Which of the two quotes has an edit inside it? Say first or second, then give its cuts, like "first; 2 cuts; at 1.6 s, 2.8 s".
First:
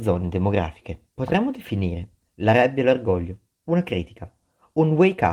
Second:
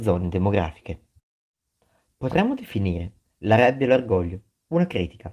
first; 1 cut; at 1.1 s